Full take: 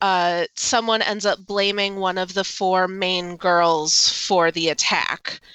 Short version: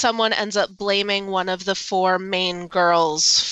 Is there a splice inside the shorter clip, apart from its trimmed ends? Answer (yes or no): no